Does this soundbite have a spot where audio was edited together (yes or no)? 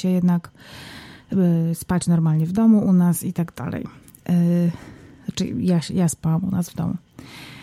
no